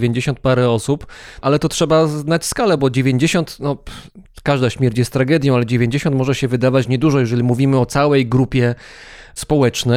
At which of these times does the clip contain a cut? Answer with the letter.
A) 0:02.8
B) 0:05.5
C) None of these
C